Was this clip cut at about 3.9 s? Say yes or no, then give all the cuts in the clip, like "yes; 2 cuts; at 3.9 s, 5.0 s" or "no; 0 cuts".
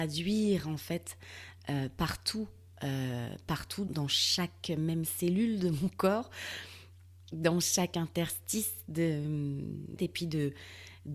yes; 2 cuts; at 3.9 s, 10.0 s